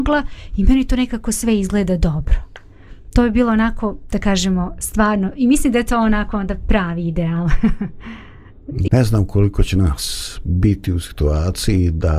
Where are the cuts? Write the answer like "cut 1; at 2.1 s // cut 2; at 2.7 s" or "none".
cut 1; at 8.9 s